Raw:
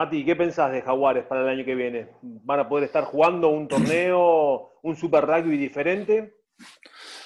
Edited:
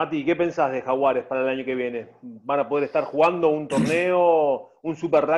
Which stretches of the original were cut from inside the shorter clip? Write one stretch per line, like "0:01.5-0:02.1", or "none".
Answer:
none